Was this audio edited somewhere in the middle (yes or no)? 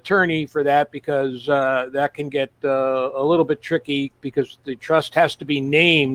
no